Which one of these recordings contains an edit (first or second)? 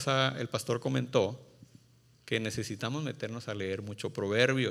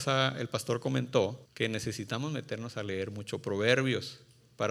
second